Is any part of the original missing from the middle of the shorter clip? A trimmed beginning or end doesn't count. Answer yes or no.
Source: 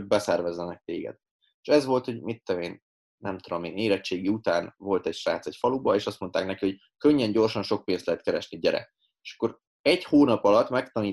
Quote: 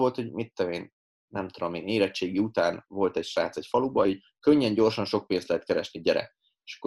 yes